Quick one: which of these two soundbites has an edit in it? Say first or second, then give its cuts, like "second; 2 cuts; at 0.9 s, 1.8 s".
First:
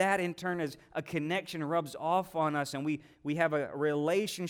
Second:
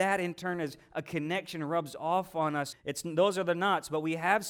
second; 1 cut; at 2.7 s